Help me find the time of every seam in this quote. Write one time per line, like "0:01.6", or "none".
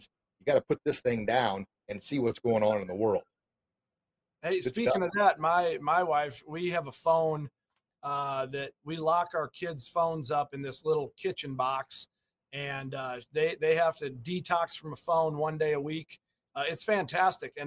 none